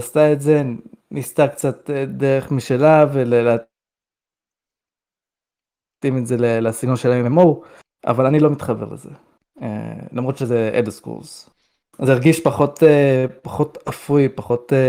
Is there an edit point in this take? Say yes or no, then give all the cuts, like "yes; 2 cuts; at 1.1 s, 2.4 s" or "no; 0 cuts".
yes; 1 cut; at 11.8 s